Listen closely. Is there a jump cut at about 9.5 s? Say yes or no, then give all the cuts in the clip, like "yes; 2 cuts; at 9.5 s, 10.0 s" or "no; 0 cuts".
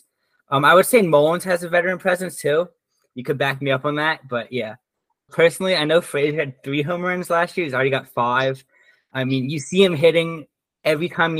no; 1 cut; at 5.3 s